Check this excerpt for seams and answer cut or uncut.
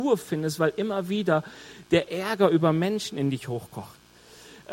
uncut